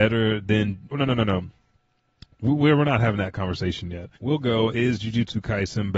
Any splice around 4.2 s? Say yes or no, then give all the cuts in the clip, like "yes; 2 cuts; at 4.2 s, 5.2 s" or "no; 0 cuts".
yes; 2 cuts; at 0.9 s, 4.2 s